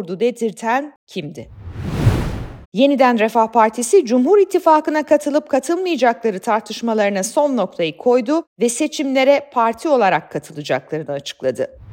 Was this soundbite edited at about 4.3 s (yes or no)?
no